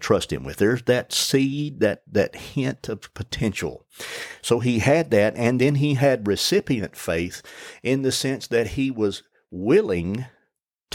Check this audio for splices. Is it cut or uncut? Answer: uncut